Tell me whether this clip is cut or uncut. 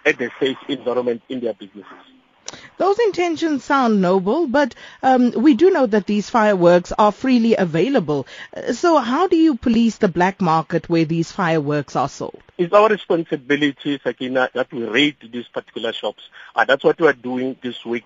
cut